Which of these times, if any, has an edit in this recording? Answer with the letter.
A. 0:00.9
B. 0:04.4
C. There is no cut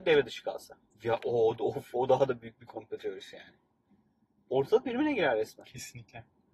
A